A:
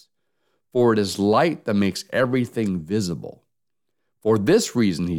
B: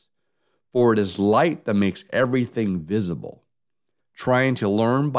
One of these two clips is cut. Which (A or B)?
B